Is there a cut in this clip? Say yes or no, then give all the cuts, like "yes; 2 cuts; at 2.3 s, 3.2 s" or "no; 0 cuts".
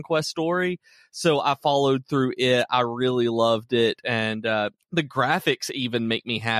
yes; 1 cut; at 4.8 s